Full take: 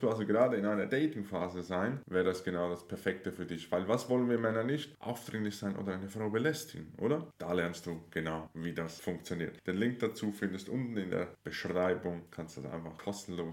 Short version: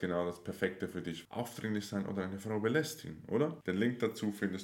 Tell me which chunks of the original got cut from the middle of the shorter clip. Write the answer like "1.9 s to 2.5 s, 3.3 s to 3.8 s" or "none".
3.7 s to 5.0 s, 7.3 s to 9.6 s